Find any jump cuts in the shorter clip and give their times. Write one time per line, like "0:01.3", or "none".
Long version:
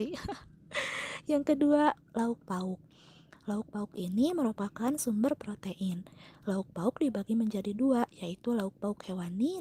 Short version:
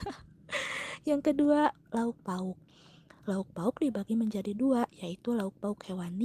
0:03.2